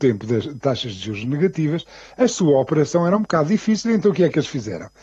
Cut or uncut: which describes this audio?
uncut